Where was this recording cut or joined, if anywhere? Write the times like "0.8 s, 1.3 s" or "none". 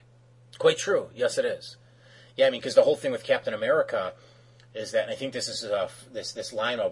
none